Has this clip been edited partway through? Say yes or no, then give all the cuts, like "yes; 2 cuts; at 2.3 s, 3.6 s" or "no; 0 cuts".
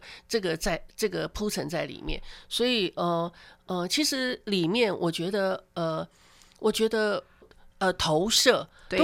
yes; 1 cut; at 7.4 s